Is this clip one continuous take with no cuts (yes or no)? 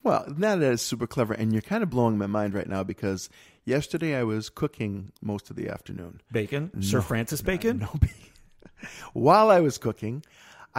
no